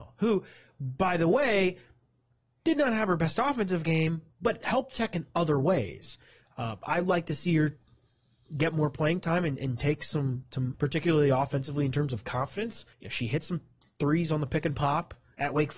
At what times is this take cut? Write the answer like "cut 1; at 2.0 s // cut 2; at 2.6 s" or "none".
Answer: cut 1; at 10.7 s // cut 2; at 12.9 s